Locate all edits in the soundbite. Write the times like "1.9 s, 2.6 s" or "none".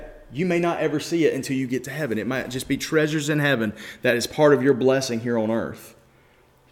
none